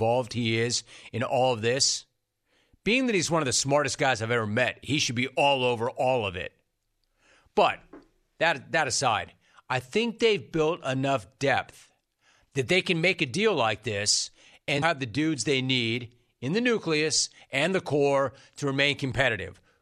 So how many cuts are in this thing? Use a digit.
1